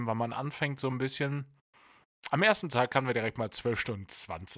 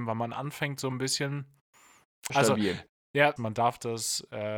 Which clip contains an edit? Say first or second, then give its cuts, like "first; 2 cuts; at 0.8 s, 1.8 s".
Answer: second; 2 cuts; at 2.3 s, 3.4 s